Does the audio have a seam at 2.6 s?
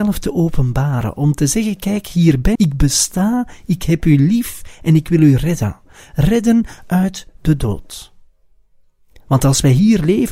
yes; 1 cut; at 2.6 s

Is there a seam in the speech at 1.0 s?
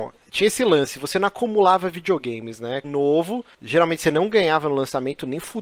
no; 1 cut; at 2.8 s

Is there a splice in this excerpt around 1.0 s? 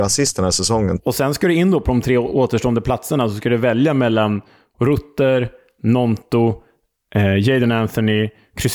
yes; 1 cut; at 1.0 s

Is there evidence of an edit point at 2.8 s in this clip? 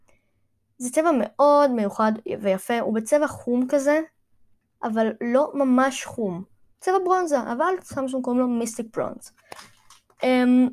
no; 1 cut; at 6.7 s

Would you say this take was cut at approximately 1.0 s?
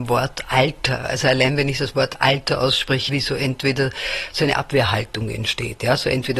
no; 1 cut; at 3.1 s

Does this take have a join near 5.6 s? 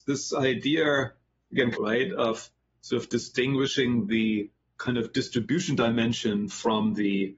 no; 1 cut; at 1.8 s

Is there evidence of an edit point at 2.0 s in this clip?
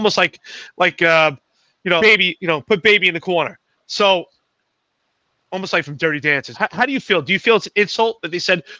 yes; 2 cuts; at 2.0 s, 6.5 s

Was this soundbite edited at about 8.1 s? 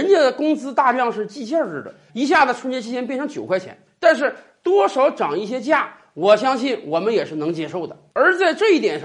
no; 1 cut; at 2.1 s

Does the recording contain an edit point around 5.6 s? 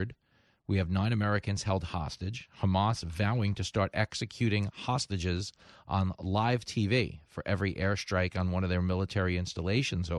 no; 0 cuts

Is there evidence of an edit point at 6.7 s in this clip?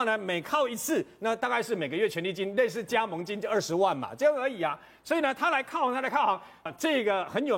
yes; 1 cut; at 6.7 s

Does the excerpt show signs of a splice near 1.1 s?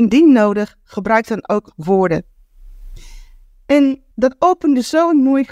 no; 1 cut; at 4.1 s

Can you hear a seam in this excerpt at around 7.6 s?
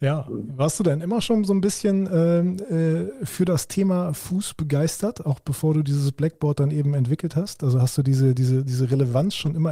no; 0 cuts

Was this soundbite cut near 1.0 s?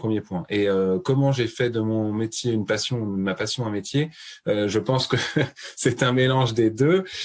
no; 0 cuts

